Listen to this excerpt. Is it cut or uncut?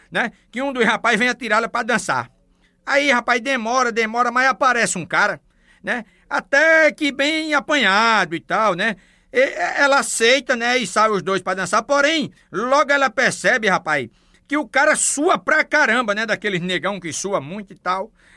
uncut